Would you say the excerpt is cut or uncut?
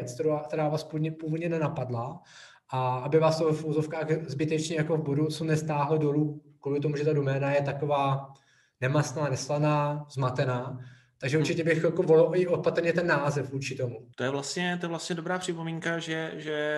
cut